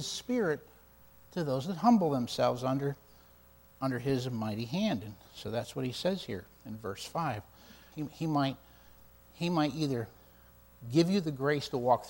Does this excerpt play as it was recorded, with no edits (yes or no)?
no